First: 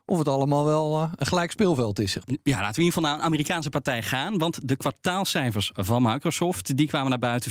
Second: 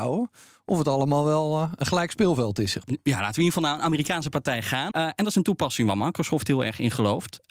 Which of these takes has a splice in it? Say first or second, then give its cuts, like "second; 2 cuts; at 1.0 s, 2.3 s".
second; 1 cut; at 4.9 s